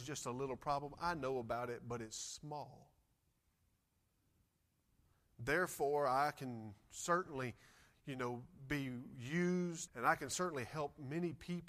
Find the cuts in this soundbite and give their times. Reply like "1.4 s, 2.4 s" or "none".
9.9 s